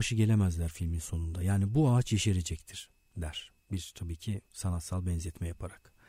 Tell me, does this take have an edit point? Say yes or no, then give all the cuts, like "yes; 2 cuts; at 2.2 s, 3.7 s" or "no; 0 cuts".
no; 0 cuts